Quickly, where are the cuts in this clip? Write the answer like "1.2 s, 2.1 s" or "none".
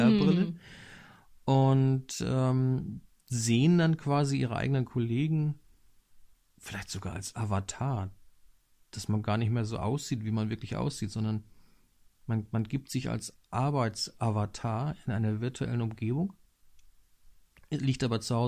none

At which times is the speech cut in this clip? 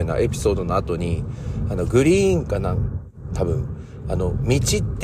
none

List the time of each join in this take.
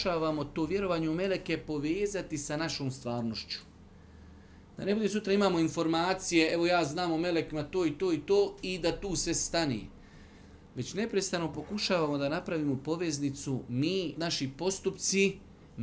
14.1 s

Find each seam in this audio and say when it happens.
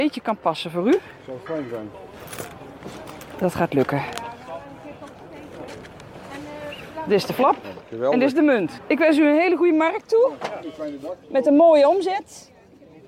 8.8 s

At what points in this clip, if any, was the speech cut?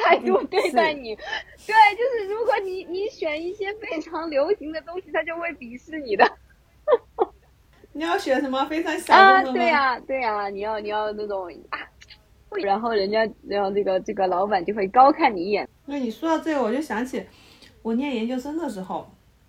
12.6 s, 15.6 s

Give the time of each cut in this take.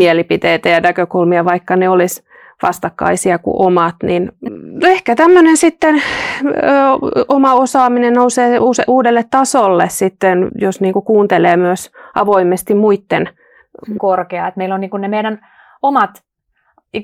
4.5 s, 10.5 s, 14.0 s

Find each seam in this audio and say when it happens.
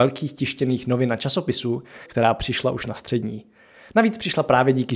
2.1 s

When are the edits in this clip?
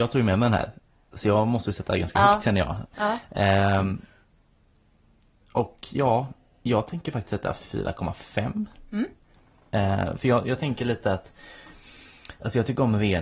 2.9 s

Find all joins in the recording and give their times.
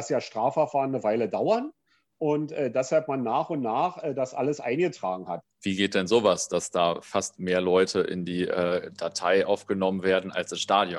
5.4 s

